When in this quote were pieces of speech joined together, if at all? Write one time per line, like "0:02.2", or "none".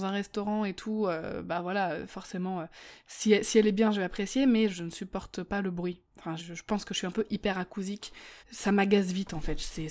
0:04.7
0:06.4
0:08.4

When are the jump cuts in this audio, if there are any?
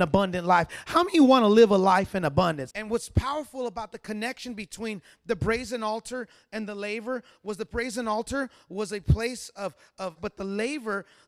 0:02.7
0:10.2

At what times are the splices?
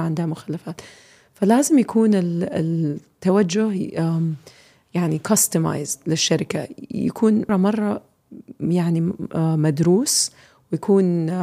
0:07.5

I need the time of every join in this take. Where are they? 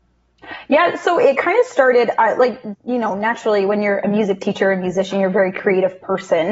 0:02.7

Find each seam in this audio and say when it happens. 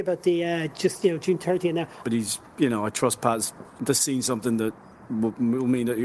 0:02.0

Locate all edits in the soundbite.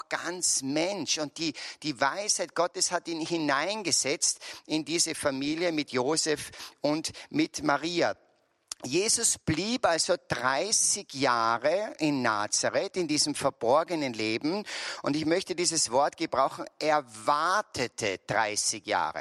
none

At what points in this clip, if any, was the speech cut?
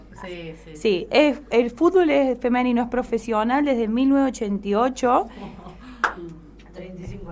none

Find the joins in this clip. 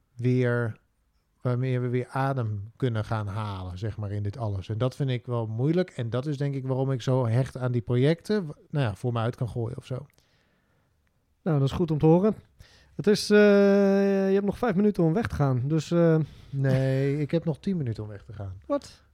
0:08.7

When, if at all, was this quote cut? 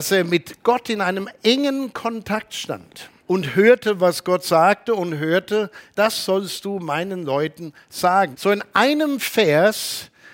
0:03.2
0:05.9
0:08.3

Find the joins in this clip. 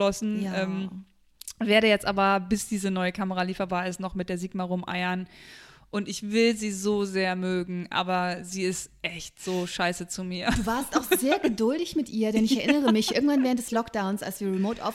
none

